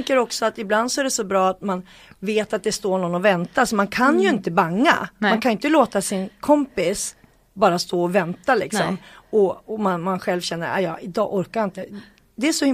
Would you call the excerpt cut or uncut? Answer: uncut